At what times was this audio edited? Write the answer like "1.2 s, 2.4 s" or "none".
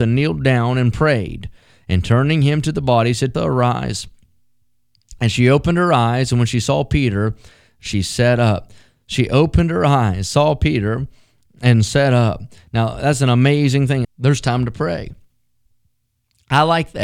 3.3 s, 14.0 s